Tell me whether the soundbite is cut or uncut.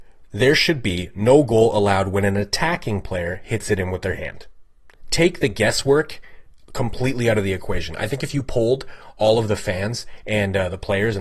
uncut